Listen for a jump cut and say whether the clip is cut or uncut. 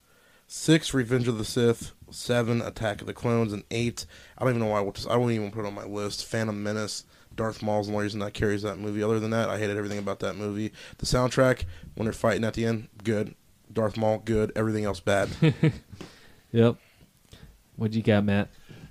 cut